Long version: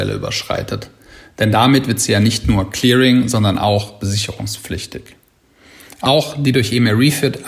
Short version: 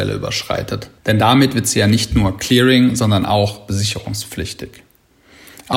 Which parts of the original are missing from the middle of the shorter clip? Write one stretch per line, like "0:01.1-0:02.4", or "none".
0:01.0-0:01.3